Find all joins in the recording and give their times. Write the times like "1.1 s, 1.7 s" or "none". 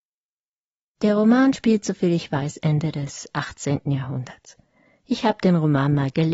none